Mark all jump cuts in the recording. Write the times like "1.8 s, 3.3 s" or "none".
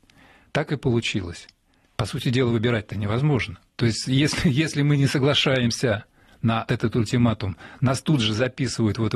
1.8 s, 3.7 s, 6.7 s